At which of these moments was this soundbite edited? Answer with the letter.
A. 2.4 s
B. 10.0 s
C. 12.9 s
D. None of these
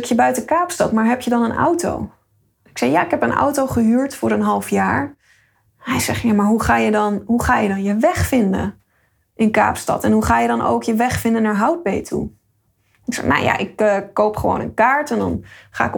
D